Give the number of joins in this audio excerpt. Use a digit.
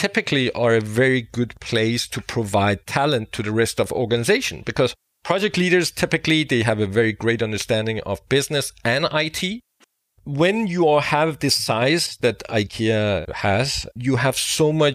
2